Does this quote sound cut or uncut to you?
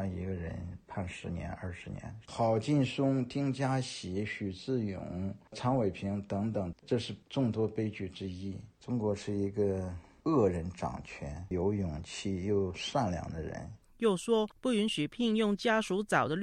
cut